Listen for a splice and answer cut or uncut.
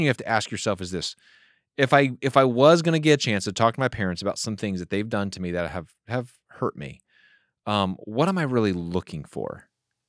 uncut